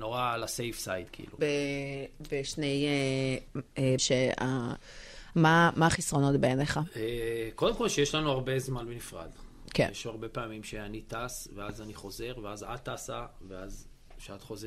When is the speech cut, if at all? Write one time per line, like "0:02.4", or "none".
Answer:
0:01.4
0:04.0
0:05.3

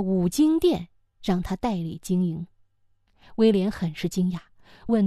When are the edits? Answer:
none

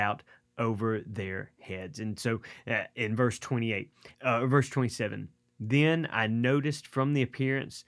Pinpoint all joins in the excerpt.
0:04.1

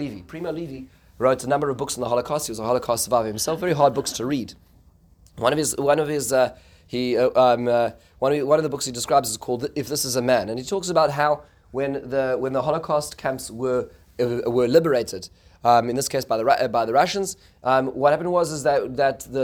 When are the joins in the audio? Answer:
none

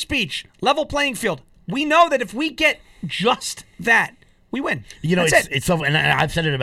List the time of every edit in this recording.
none

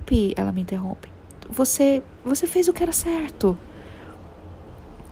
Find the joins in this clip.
0:02.2

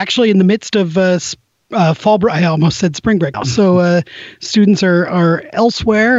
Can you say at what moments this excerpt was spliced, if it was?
0:03.3

